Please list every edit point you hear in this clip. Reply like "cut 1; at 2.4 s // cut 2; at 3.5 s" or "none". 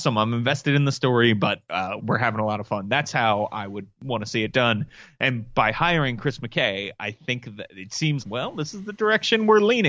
cut 1; at 2.0 s // cut 2; at 8.2 s